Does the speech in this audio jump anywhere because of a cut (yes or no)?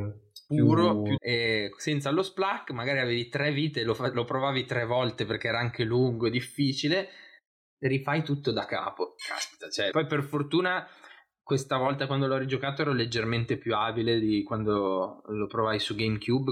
yes